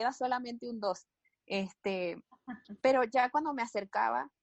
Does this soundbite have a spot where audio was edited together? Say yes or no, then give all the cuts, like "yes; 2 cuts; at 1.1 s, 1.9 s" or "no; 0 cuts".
no; 0 cuts